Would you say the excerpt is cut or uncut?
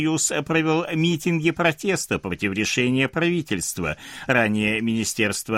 cut